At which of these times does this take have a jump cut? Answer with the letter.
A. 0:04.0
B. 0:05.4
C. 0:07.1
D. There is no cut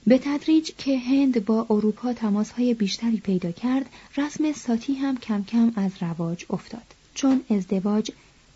C